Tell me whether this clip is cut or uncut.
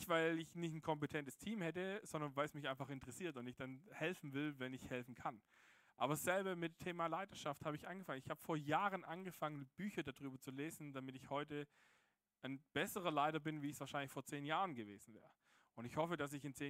uncut